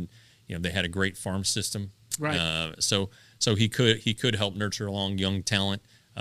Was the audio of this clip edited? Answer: no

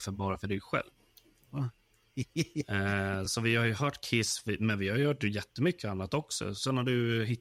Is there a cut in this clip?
no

